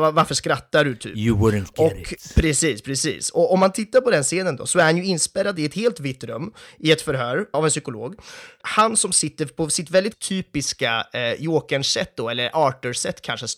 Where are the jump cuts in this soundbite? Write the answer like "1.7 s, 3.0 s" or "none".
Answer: 7.5 s